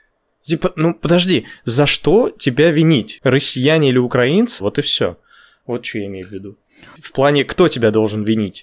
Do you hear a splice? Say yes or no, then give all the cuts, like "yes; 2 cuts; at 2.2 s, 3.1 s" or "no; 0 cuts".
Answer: yes; 3 cuts; at 3.2 s, 4.6 s, 7.0 s